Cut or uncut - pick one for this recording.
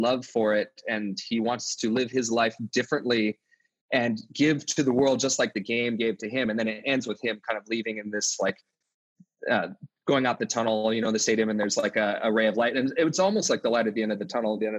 uncut